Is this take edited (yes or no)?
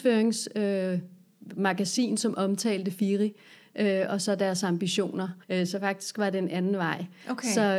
yes